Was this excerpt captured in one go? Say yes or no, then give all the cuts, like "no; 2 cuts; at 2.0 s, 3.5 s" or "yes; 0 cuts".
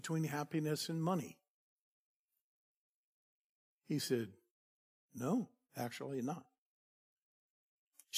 yes; 0 cuts